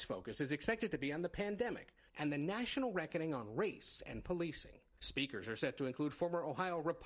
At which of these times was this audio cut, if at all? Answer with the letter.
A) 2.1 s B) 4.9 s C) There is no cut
A